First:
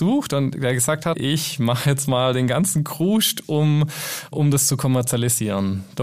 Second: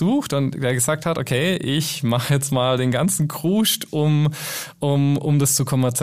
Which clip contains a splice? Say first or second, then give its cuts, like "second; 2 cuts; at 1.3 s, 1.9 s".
first; 2 cuts; at 1.1 s, 4.3 s